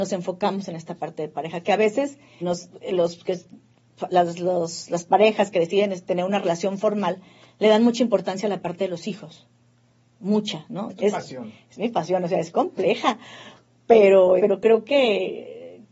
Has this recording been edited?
yes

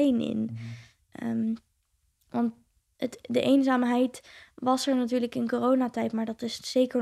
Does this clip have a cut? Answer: no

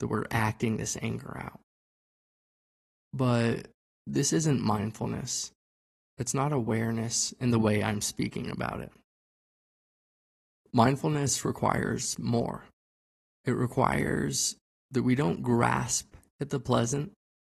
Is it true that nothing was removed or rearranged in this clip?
yes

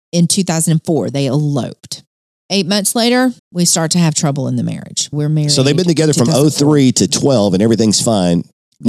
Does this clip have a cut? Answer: yes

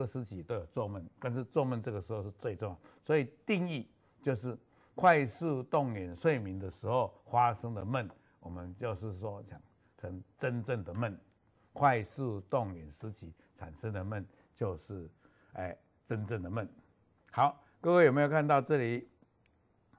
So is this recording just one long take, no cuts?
yes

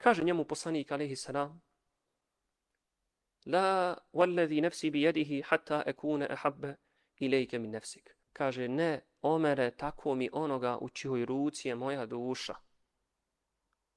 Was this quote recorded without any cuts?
no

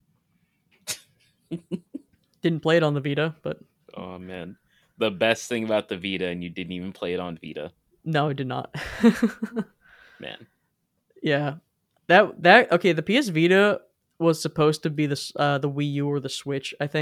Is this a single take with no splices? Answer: yes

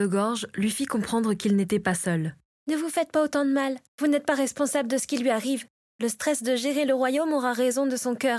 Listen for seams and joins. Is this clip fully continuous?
no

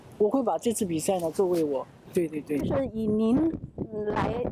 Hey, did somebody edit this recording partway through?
yes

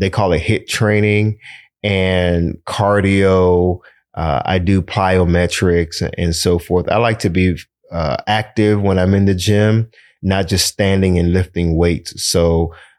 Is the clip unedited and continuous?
yes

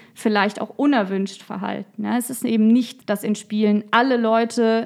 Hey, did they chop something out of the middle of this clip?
yes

